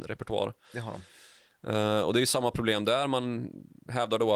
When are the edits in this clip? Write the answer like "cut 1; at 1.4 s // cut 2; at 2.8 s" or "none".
none